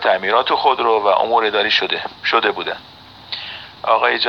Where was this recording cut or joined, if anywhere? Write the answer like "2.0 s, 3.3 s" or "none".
2.2 s